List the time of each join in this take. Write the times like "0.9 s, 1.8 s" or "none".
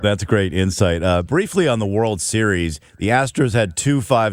none